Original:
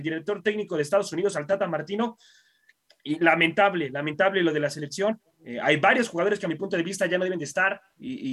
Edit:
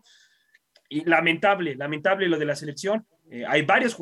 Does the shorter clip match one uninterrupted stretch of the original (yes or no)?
yes